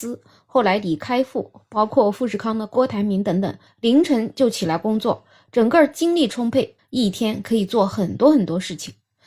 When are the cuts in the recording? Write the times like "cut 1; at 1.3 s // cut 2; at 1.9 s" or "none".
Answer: cut 1; at 3.7 s // cut 2; at 6.8 s